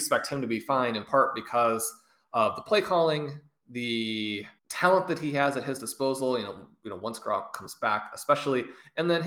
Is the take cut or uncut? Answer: cut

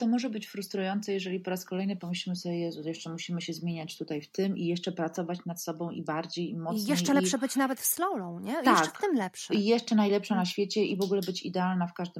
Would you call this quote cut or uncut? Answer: uncut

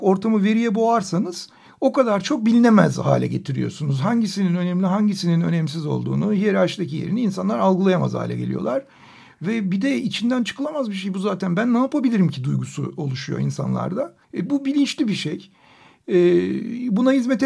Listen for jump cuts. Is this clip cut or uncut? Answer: cut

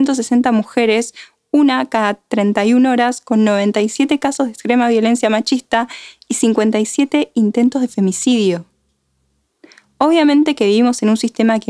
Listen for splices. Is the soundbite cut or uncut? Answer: uncut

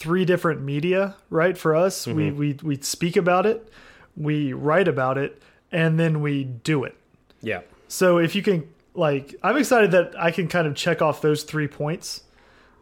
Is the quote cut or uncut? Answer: uncut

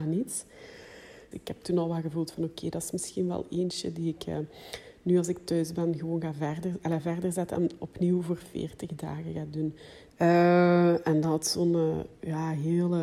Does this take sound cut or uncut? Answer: cut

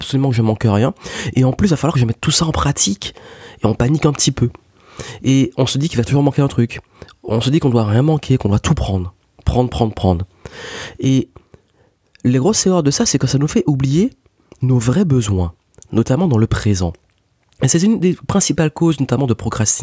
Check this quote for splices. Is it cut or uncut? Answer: uncut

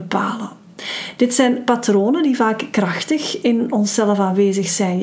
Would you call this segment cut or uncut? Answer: uncut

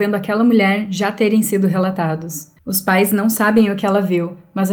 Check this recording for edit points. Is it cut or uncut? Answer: cut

